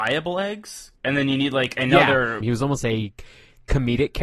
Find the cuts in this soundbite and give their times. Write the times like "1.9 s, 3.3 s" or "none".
1.0 s, 2.4 s